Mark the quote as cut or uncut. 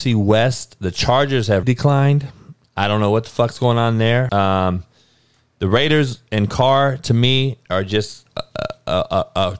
cut